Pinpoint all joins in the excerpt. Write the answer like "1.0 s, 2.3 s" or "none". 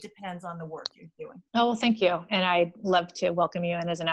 1.5 s

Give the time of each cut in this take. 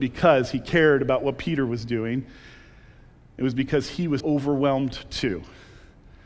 4.2 s

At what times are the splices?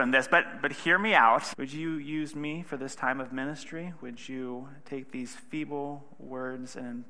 1.5 s

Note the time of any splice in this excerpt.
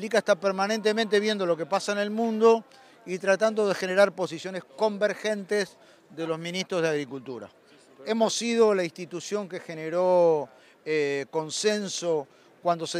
none

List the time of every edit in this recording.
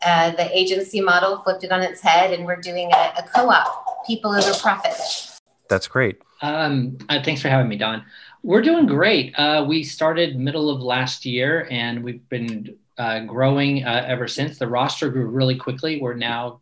6.2 s

